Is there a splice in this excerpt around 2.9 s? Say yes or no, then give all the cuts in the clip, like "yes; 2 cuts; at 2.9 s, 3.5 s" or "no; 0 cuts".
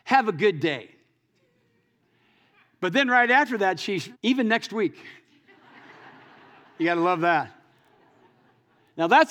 no; 1 cut; at 4.1 s